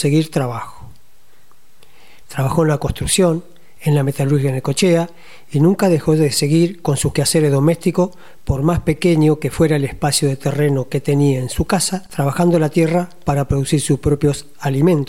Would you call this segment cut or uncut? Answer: cut